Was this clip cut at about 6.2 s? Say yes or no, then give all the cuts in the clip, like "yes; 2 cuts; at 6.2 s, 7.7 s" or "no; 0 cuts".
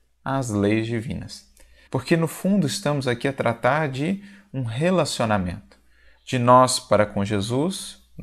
no; 1 cut; at 1.9 s